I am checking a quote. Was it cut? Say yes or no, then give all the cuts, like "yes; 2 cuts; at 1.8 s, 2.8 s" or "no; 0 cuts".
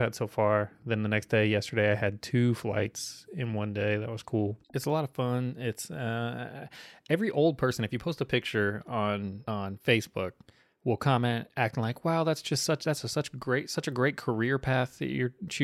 no; 0 cuts